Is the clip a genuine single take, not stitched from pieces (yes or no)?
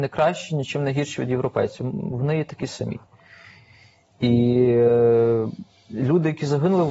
yes